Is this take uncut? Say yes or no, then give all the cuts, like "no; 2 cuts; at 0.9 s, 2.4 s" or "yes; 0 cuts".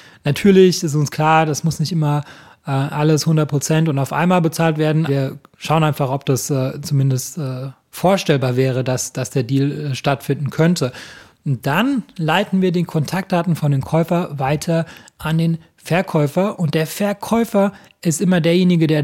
no; 1 cut; at 5.1 s